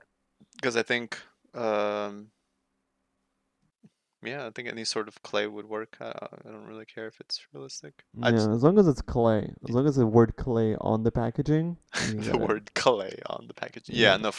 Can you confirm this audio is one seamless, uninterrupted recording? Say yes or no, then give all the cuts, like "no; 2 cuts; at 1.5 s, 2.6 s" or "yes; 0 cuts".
no; 1 cut; at 8.1 s